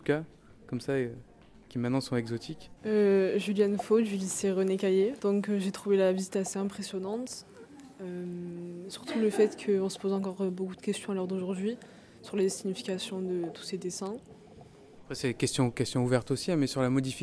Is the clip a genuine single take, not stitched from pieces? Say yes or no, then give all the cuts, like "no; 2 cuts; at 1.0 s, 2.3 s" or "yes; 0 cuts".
no; 1 cut; at 2.8 s